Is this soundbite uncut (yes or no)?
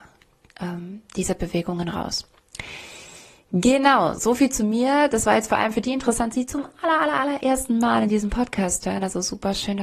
no